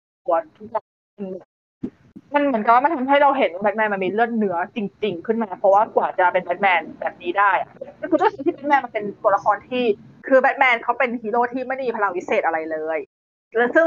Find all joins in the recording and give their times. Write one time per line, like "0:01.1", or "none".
none